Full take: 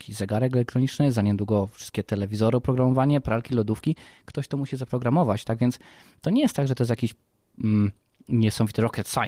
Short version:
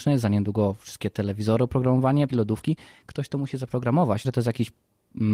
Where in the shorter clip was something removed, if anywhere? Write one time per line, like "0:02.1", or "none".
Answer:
0:02.3
0:04.2